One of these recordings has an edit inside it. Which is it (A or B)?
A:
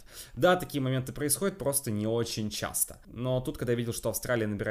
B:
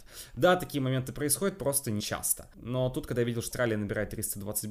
B